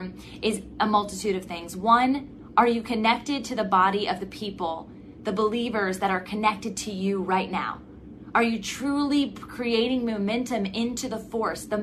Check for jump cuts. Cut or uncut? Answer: cut